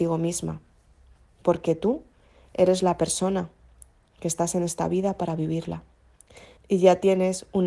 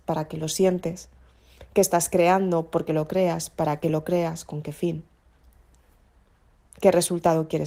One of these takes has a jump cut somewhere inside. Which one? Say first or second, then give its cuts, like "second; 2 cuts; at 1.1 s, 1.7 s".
first; 1 cut; at 6.6 s